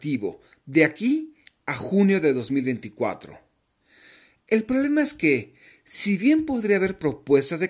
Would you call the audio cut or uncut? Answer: uncut